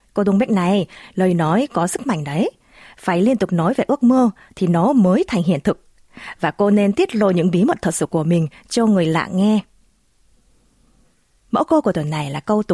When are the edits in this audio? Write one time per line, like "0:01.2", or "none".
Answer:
none